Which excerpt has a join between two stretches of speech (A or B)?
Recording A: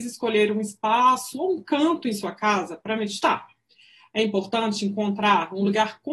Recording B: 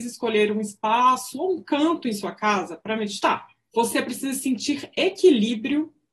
B